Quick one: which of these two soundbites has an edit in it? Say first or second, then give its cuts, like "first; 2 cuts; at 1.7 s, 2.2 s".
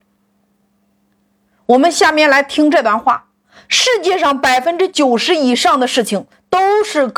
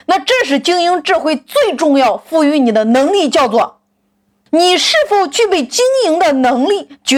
second; 1 cut; at 4.5 s